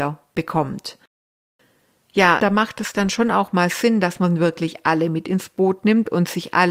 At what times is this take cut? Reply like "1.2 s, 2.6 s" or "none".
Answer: 2.4 s